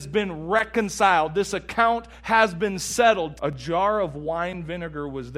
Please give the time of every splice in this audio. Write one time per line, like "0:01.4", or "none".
0:03.4

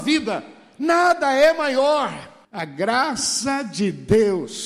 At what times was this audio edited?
0:02.4

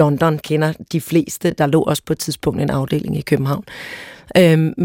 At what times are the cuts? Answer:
none

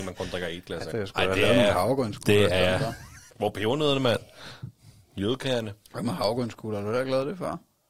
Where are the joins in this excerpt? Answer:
0:00.9
0:03.3

